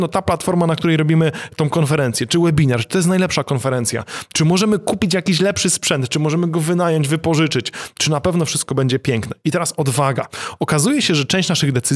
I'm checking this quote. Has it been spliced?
no; 0 cuts

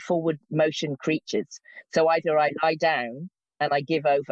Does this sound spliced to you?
no; 0 cuts

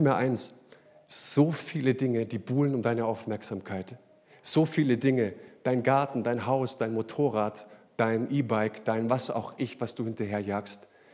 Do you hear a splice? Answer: no; 0 cuts

